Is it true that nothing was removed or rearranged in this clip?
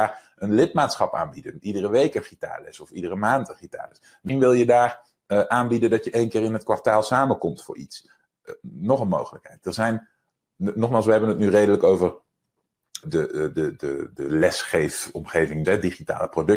no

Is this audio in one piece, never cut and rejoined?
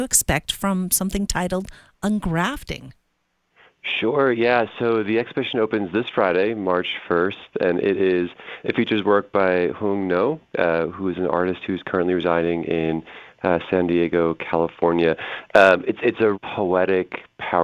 no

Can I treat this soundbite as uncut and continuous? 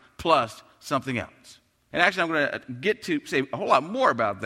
no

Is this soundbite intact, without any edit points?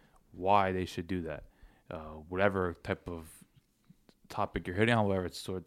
yes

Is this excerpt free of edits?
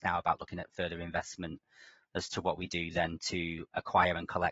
yes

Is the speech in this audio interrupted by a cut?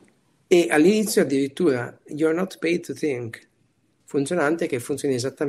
yes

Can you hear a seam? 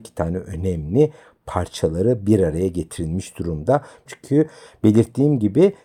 yes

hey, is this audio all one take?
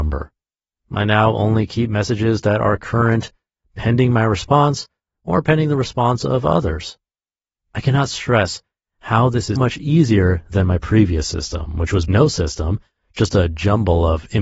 no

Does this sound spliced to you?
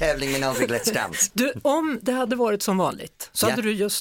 yes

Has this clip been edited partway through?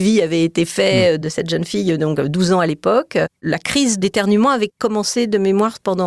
no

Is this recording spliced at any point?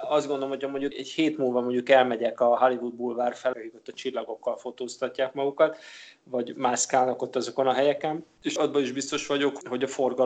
yes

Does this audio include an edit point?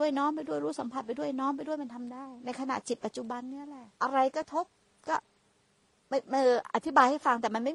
yes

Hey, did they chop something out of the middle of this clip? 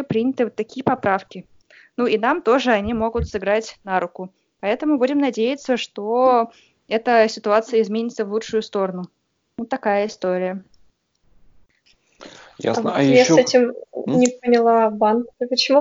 no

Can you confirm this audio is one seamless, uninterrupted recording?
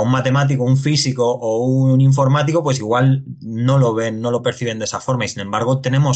yes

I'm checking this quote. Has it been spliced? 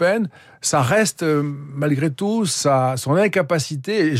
no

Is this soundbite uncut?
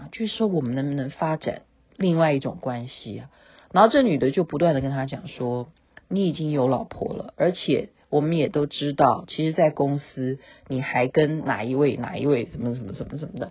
yes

